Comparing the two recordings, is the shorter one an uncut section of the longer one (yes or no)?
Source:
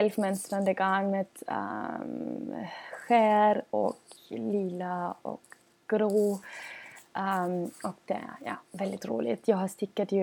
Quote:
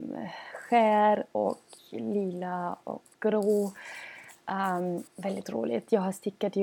no